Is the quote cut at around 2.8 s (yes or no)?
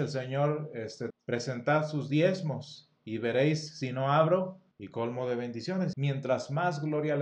no